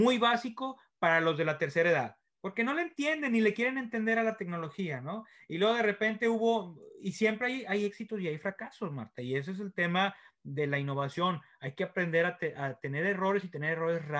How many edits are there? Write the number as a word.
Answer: zero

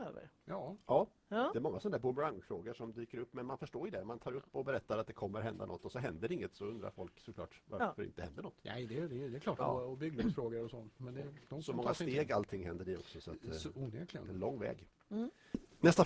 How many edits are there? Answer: one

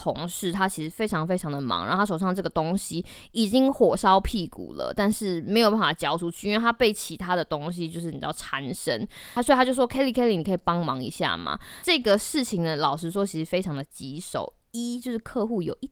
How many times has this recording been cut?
zero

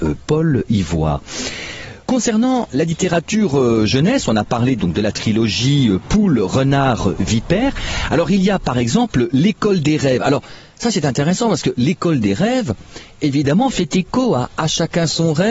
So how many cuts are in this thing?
one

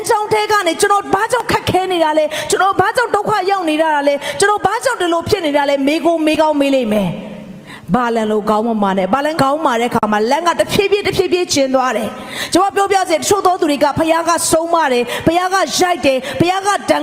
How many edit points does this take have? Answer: one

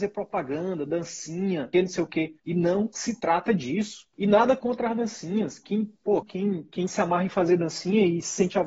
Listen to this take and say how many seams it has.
two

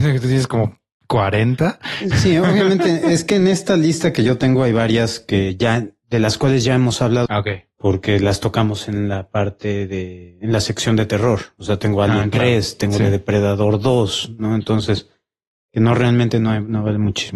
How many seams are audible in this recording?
one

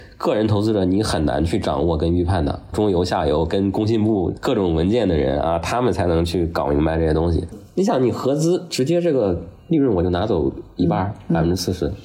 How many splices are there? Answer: two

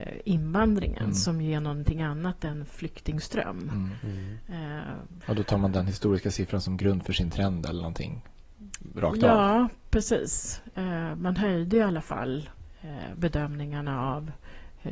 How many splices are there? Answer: one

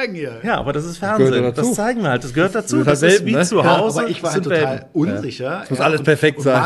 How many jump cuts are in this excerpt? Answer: zero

